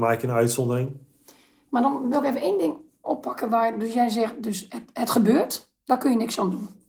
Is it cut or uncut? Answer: uncut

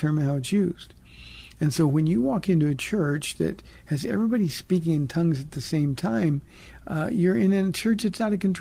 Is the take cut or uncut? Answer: uncut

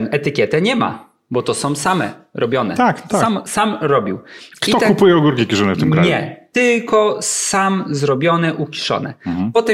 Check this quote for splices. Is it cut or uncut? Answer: uncut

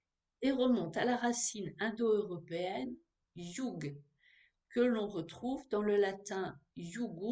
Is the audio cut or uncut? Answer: uncut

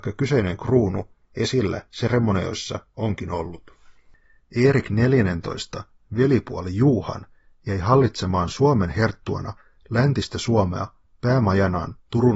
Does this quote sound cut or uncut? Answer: uncut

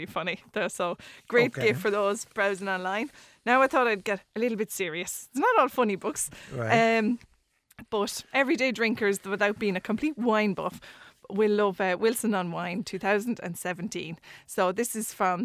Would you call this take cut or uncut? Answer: cut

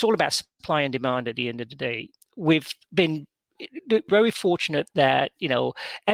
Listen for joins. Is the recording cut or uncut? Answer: uncut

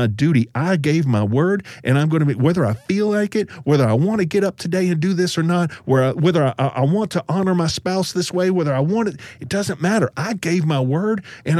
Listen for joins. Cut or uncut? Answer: uncut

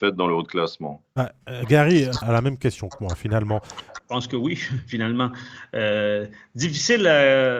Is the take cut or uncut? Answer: cut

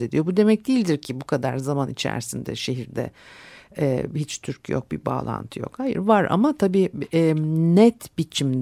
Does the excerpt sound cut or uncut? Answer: uncut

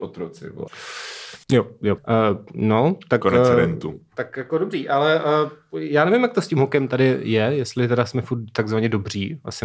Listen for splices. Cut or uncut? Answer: cut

